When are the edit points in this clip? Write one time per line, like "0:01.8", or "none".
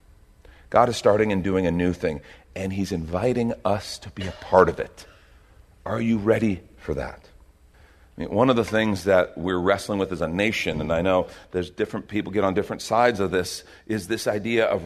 none